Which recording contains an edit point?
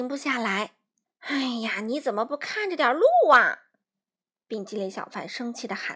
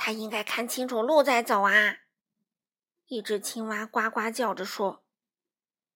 first; 1 cut; at 1.0 s

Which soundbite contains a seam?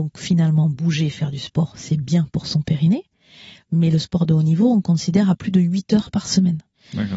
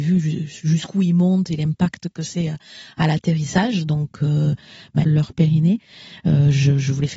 second; 1 cut; at 5.0 s

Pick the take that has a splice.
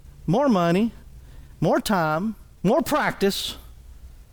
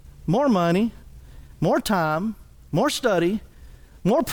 first; 1 cut; at 2.6 s

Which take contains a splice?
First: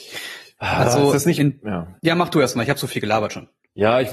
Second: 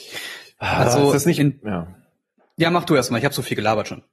first; 1 cut; at 2.0 s

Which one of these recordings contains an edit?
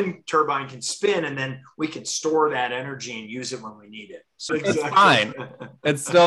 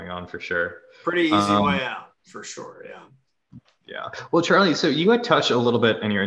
first; 1 cut; at 4.5 s

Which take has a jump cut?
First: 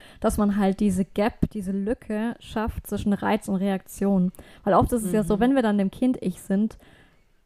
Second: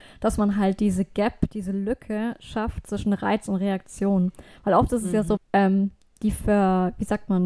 second; 1 cut; at 5.4 s

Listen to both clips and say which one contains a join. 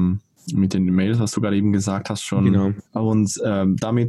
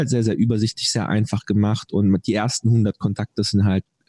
first; 1 cut; at 2.9 s

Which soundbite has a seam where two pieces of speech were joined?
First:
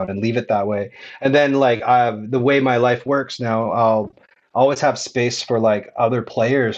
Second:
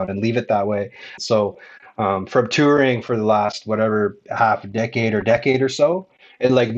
second; 1 cut; at 1.2 s

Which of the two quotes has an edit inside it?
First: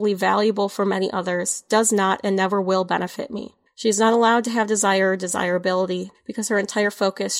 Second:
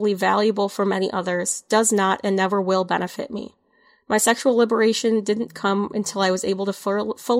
first; 2 cuts; at 3.7 s, 6.1 s

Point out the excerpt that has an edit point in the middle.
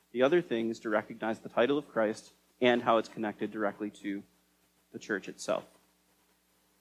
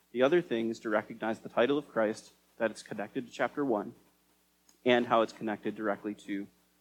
first; 1 cut; at 2.5 s

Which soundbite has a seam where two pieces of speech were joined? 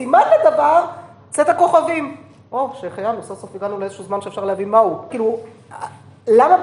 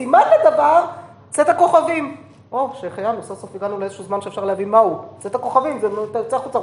first; 1 cut; at 5.1 s

